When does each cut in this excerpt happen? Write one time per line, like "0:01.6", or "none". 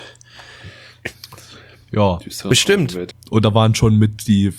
0:03.1